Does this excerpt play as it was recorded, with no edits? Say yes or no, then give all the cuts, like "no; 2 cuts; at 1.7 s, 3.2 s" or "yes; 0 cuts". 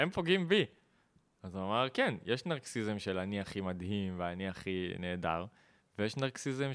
yes; 0 cuts